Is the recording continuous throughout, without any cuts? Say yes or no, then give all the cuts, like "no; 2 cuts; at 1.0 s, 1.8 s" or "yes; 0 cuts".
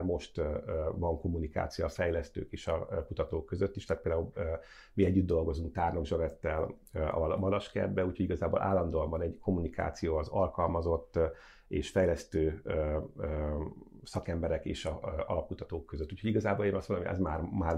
yes; 0 cuts